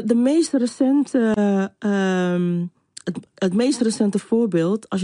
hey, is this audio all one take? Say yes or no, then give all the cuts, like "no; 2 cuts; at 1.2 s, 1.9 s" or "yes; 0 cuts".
yes; 0 cuts